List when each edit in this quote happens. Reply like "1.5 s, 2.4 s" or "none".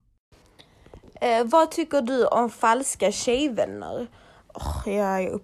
4.4 s